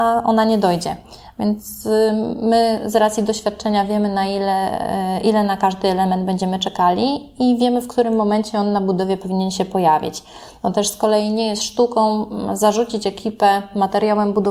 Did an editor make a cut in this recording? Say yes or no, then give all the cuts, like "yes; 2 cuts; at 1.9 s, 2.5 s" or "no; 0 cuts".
no; 0 cuts